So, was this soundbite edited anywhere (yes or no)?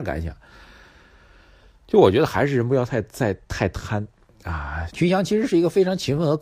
yes